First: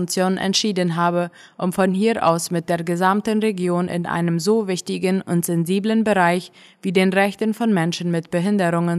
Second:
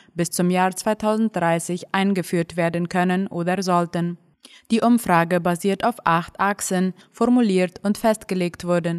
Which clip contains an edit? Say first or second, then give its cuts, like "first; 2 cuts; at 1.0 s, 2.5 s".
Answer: second; 1 cut; at 7.0 s